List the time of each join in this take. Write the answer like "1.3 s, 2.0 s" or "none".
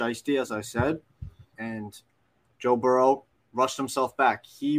1.5 s, 3.4 s